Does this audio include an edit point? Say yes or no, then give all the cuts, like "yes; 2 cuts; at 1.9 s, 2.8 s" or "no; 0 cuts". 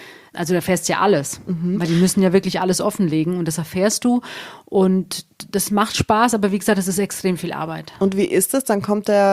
no; 0 cuts